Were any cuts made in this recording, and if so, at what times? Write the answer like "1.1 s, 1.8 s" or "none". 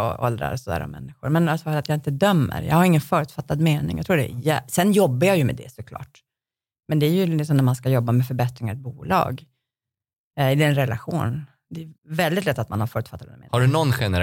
12.0 s